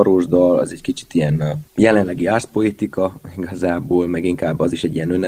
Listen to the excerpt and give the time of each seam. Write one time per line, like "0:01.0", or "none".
0:01.7